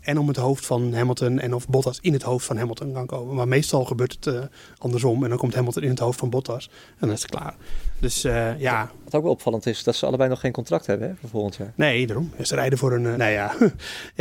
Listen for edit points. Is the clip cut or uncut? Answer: uncut